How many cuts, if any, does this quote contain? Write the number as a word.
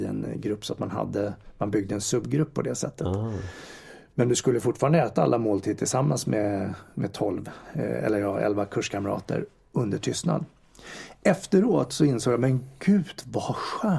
zero